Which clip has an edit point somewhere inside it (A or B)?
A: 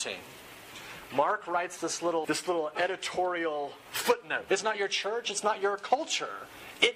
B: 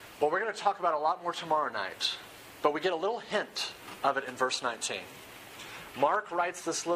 A